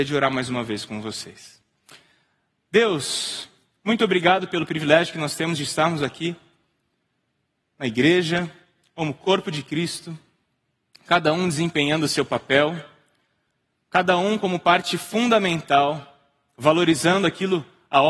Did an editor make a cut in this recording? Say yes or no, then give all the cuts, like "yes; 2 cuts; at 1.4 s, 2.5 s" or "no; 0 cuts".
yes; 1 cut; at 16.5 s